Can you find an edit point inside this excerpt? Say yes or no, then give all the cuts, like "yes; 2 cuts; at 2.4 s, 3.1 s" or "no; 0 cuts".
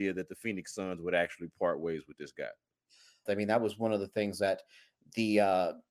yes; 1 cut; at 3.3 s